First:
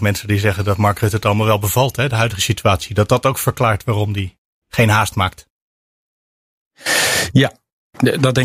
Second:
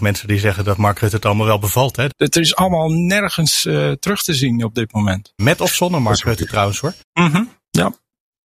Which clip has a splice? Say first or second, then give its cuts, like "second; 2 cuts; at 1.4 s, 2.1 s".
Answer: second; 3 cuts; at 2.1 s, 5.4 s, 7.0 s